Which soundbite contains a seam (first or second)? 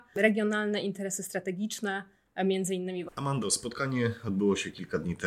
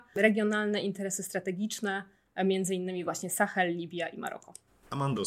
first